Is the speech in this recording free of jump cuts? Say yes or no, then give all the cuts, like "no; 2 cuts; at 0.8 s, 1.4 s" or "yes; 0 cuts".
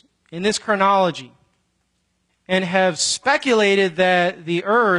no; 1 cut; at 2.3 s